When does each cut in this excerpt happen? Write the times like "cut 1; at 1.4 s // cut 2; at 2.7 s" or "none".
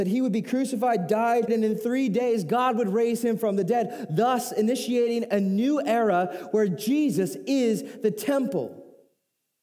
cut 1; at 1.5 s